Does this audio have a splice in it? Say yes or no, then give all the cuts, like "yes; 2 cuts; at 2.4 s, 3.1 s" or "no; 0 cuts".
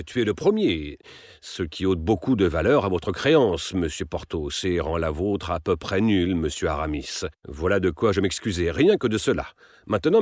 yes; 1 cut; at 7.4 s